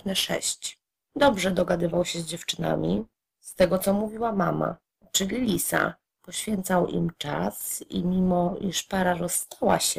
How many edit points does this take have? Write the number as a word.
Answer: one